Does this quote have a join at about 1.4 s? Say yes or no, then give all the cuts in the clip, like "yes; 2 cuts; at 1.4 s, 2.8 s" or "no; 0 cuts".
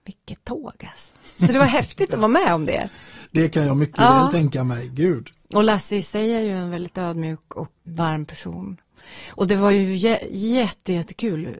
no; 1 cut; at 7.9 s